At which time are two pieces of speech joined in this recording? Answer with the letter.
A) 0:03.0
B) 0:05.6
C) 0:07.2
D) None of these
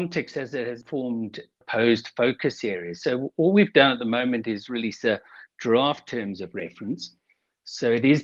D